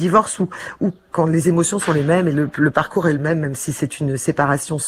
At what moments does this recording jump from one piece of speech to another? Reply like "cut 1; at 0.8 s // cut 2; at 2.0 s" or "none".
cut 1; at 1.1 s